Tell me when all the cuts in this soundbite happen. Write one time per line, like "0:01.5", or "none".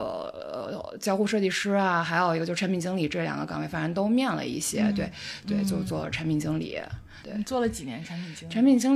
0:05.4
0:07.2